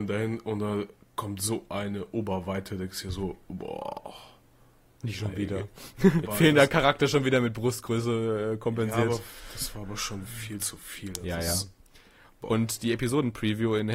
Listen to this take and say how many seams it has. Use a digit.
1